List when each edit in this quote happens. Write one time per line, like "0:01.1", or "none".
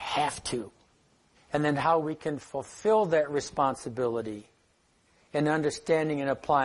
0:01.4

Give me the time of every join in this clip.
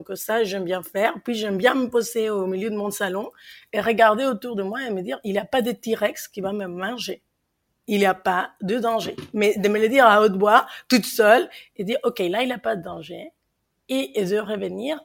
none

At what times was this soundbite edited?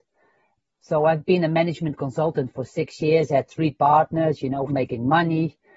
0:04.7

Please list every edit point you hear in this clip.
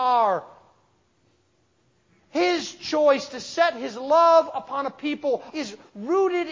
0:05.5

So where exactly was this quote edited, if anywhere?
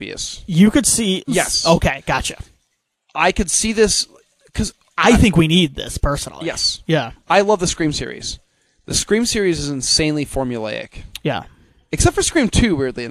0:01.3

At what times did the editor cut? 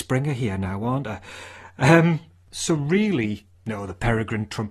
0:03.5

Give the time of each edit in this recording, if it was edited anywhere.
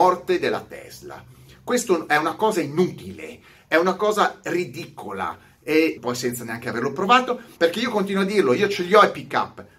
0:06.0
0:07.6

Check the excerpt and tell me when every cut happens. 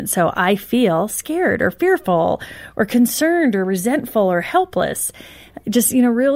none

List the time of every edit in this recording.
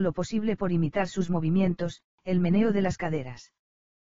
0:02.1

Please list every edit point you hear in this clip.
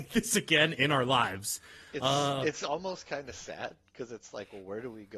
none

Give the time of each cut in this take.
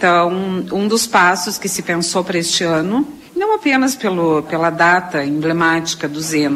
0:03.3
0:04.4

